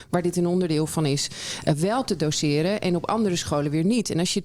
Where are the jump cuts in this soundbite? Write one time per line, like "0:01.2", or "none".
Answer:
none